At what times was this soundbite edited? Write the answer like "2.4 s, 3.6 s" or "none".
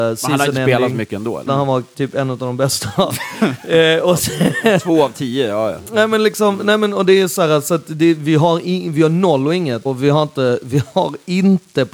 1.5 s, 9.9 s